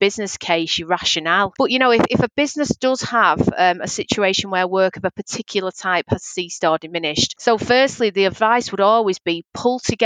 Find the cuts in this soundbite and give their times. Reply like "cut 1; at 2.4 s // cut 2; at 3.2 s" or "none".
cut 1; at 1.6 s // cut 2; at 7.4 s

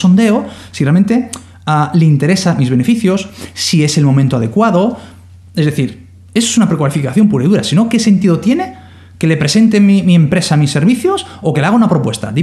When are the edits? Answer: none

